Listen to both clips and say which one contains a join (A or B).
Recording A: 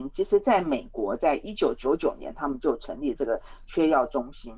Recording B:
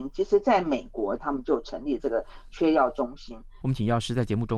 B